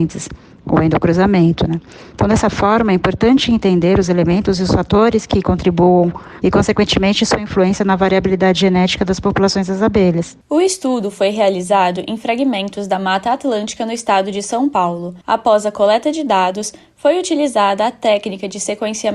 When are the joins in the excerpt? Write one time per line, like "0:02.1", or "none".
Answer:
0:06.4
0:15.2